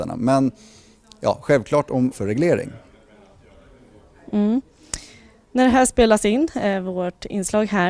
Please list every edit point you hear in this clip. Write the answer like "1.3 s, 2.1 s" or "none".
2.1 s